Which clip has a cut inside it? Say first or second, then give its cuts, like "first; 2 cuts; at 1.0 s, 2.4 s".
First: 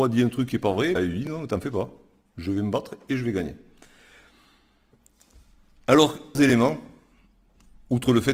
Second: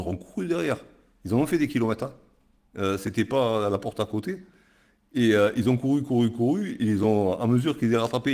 first; 2 cuts; at 1.0 s, 6.4 s